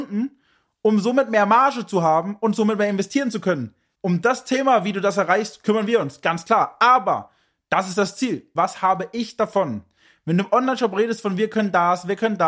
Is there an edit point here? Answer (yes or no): yes